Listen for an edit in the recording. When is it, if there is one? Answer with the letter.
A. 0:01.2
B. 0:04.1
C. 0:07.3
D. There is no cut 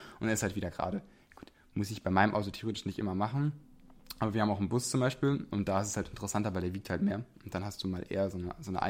D